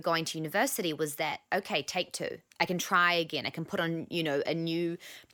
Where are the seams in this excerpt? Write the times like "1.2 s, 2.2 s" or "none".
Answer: 2.5 s